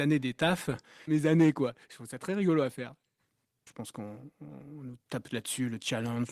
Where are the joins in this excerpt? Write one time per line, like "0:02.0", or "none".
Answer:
0:01.1
0:03.7

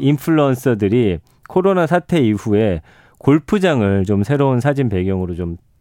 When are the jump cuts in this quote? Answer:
none

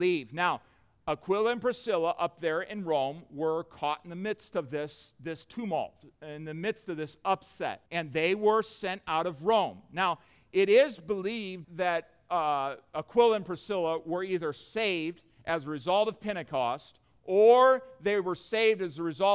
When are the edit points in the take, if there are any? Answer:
0:07.9
0:11.6

